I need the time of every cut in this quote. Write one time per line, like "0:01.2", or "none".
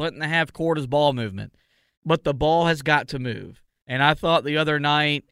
0:02.0
0:03.8